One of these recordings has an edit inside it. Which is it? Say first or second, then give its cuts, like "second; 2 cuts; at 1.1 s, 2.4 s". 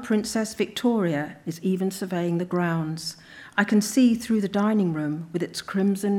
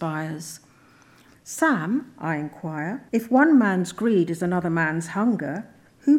second; 2 cuts; at 1.3 s, 3.1 s